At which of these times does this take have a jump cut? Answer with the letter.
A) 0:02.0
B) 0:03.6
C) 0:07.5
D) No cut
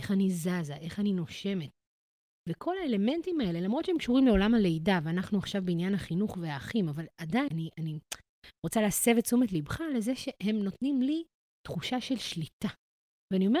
C